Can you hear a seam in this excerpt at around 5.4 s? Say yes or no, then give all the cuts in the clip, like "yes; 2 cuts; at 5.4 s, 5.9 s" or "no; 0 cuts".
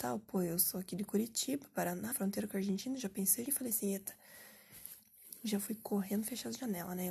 no; 2 cuts; at 2.1 s, 3.5 s